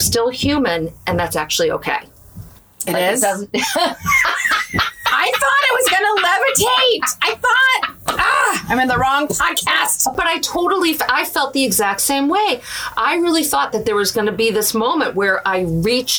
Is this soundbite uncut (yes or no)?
yes